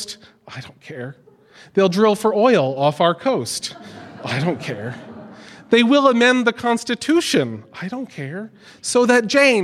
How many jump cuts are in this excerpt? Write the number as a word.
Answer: zero